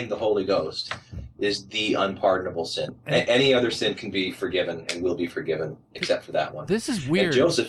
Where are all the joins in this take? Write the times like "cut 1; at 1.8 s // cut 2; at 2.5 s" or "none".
none